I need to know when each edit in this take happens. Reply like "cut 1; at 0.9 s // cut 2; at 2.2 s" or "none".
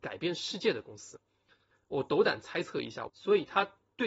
cut 1; at 1.7 s // cut 2; at 3.1 s